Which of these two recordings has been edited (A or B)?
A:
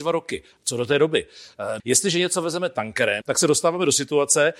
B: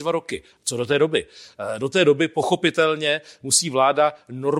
A